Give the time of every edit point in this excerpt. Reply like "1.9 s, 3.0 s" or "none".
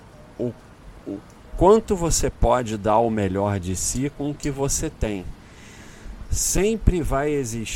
1.0 s, 6.2 s